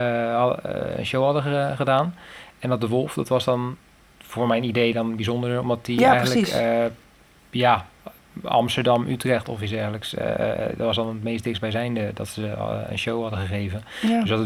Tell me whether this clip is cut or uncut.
uncut